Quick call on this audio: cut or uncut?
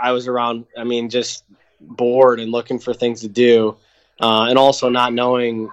uncut